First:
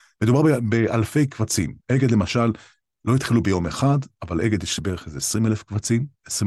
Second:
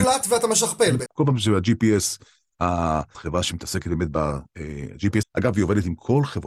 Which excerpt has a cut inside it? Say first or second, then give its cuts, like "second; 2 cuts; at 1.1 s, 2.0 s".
second; 3 cuts; at 1.1 s, 3.1 s, 5.2 s